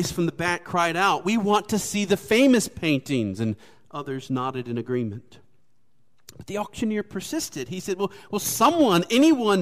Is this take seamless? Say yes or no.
yes